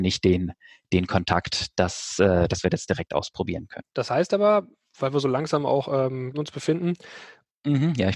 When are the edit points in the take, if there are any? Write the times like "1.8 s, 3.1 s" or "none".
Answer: 3.9 s, 6.3 s